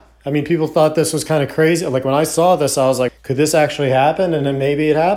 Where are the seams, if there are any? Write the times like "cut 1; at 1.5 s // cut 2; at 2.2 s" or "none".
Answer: cut 1; at 3.1 s